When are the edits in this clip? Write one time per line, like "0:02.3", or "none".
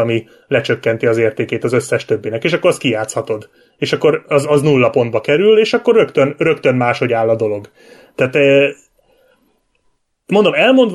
none